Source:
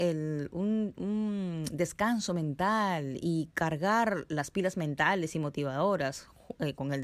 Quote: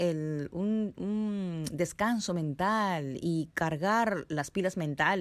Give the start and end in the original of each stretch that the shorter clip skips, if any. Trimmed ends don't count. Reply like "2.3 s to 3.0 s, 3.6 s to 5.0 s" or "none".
none